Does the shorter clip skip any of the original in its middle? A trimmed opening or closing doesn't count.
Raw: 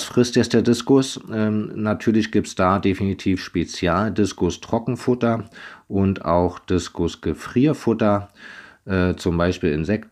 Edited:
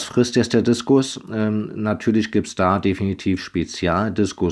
no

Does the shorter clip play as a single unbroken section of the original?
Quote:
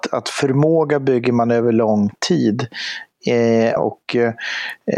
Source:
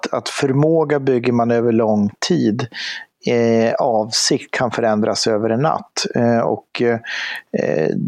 no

